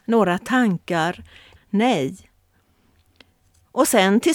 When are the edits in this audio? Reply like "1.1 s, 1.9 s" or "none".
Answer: 1.6 s